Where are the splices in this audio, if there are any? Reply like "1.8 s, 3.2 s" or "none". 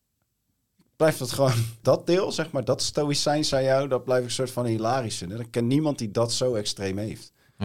1.8 s